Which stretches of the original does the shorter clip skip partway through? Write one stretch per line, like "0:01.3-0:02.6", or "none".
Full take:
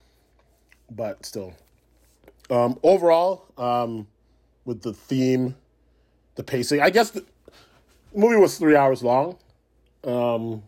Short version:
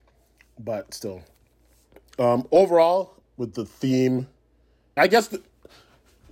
0:03.5-0:04.5
0:06.2-0:06.8